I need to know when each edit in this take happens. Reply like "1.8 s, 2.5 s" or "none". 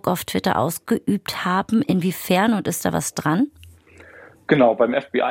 none